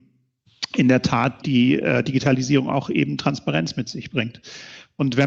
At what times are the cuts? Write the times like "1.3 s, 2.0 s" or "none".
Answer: 1.4 s